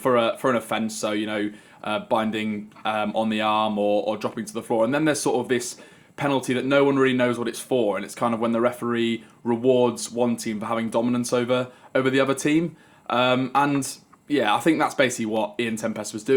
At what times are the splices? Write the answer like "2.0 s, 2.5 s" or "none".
none